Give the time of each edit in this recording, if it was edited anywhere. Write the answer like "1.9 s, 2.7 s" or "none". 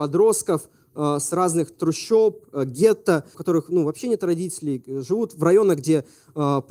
3.3 s